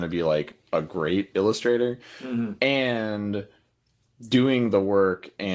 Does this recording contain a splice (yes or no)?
no